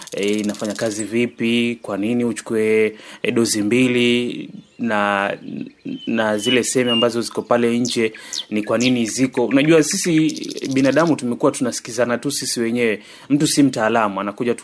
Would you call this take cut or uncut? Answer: uncut